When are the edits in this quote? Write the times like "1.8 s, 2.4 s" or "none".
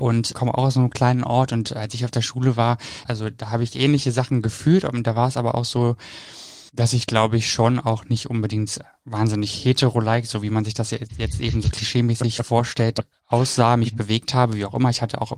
none

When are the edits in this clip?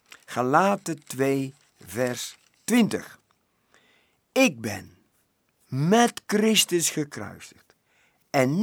none

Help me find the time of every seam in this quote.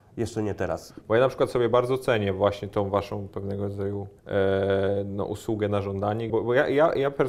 4.2 s, 6.3 s

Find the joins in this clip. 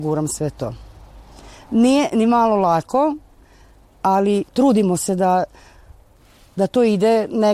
4.5 s

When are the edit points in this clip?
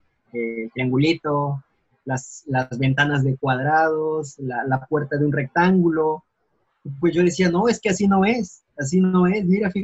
none

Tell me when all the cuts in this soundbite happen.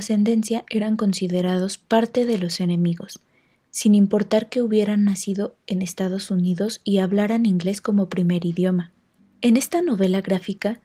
none

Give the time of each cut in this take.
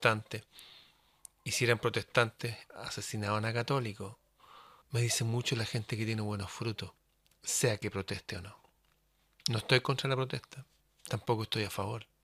4.8 s

